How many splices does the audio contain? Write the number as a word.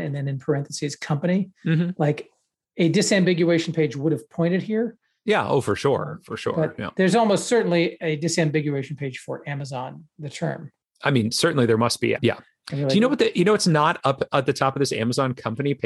one